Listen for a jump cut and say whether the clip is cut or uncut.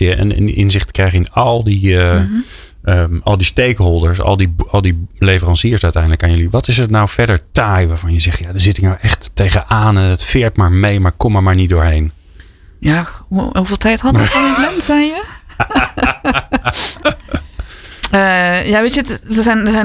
uncut